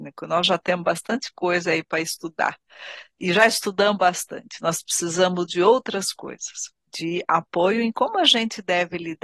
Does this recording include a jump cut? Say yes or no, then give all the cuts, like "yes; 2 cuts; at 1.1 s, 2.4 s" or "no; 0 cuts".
yes; 1 cut; at 6.8 s